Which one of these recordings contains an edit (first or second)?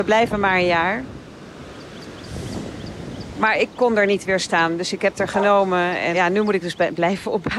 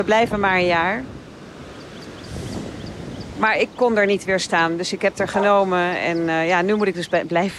first